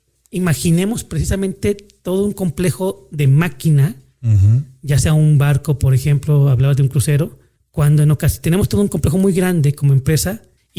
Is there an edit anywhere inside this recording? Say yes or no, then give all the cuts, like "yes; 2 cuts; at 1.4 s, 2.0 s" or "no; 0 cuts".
no; 0 cuts